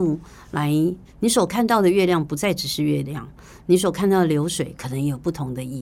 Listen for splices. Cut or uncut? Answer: cut